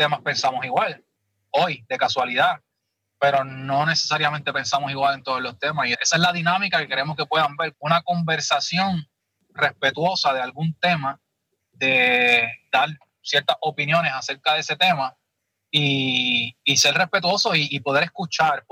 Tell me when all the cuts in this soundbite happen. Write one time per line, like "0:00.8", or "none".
0:05.9
0:07.7